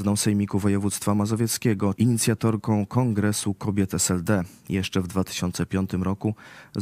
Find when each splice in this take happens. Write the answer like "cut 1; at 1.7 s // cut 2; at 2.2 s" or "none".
cut 1; at 2.0 s